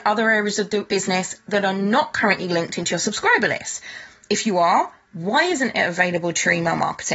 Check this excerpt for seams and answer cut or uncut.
uncut